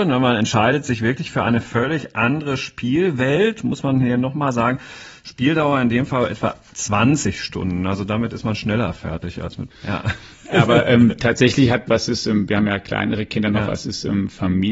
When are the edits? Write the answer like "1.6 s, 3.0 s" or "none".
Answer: 9.7 s, 11.9 s